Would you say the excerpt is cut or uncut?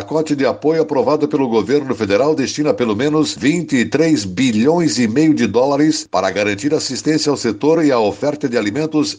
uncut